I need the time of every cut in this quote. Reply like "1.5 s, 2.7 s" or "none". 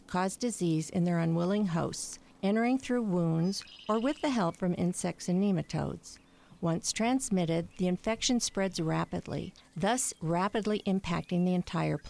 9.6 s

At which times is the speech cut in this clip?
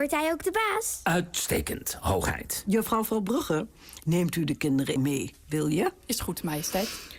5.0 s

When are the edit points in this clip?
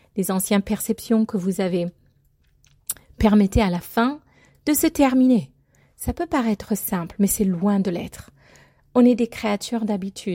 none

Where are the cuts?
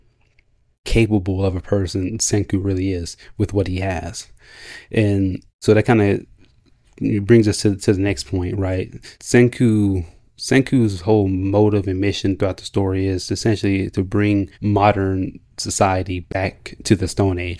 9.1 s, 14.5 s

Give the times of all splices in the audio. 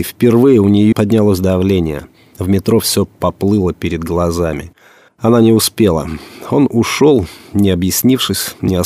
0.9 s

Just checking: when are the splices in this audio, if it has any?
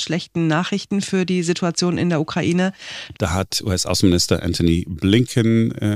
3.1 s

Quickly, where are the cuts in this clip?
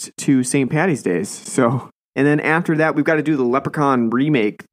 2.0 s

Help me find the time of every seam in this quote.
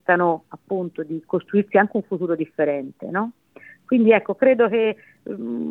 none

